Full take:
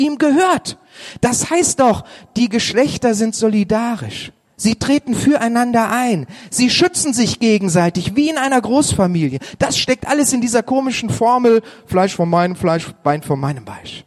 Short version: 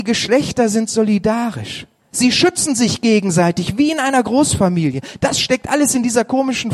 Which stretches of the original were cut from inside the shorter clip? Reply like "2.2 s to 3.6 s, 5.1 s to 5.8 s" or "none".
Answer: 4.6 s to 6.5 s